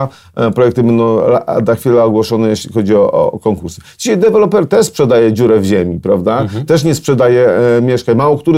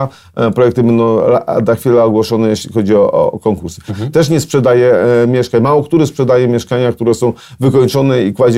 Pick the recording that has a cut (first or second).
second